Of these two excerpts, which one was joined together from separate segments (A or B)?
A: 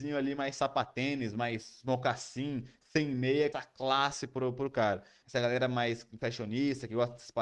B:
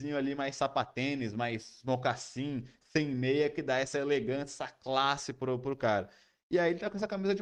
A